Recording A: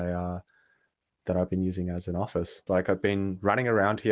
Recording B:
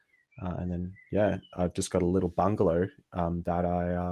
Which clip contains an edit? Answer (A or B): A